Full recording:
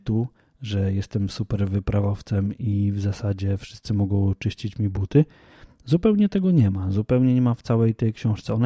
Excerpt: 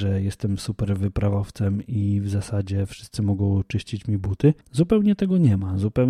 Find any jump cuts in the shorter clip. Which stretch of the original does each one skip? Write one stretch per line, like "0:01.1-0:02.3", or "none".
0:05.3-0:05.7